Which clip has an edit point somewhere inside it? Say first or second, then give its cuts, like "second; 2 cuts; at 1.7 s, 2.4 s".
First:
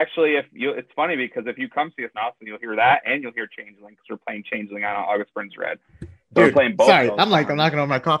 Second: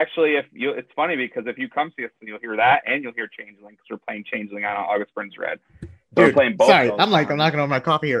second; 1 cut; at 2.1 s